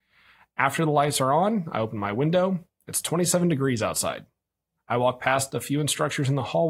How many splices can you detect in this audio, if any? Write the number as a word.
one